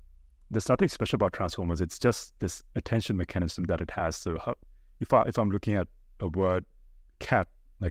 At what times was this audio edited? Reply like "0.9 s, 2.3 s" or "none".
none